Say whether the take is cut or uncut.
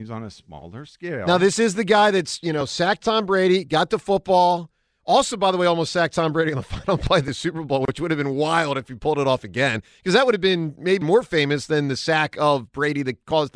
cut